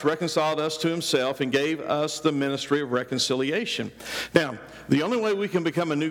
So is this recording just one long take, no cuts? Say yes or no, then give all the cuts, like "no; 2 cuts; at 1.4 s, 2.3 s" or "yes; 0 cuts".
yes; 0 cuts